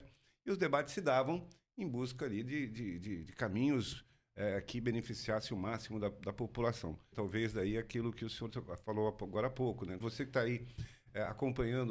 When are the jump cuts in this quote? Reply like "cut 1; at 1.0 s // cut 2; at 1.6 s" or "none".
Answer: cut 1; at 7.1 s // cut 2; at 10.0 s